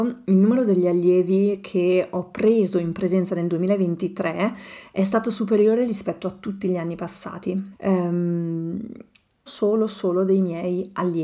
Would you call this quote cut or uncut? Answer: cut